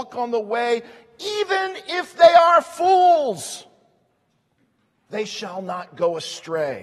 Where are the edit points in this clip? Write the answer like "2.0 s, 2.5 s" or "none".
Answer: none